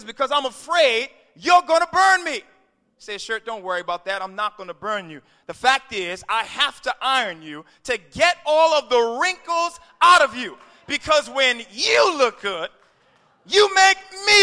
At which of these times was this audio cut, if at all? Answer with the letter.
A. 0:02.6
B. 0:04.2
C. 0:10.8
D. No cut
D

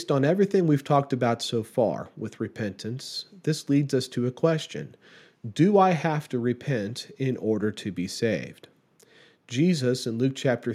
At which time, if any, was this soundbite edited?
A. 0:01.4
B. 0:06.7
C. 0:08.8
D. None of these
D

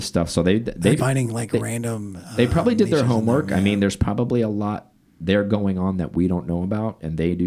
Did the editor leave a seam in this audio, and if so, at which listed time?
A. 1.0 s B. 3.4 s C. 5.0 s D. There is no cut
A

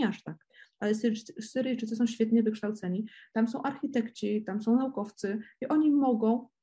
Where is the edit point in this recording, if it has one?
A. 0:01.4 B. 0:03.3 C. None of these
C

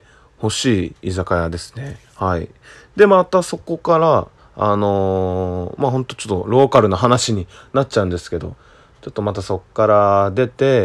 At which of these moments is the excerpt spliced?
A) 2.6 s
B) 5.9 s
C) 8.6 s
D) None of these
D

